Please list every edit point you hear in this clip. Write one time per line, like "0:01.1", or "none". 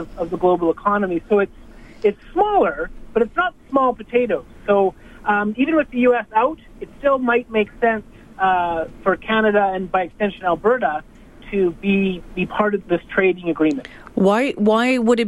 0:12.8